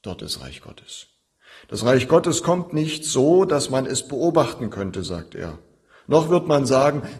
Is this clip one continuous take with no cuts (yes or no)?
yes